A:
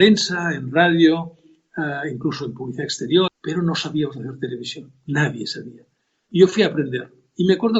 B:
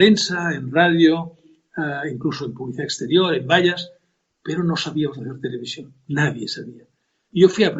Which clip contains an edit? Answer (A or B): A